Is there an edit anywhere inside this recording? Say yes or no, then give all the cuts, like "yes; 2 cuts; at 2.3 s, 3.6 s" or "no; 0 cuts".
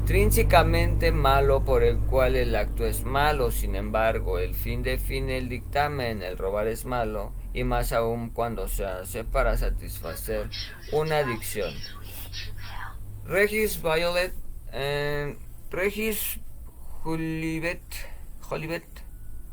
no; 0 cuts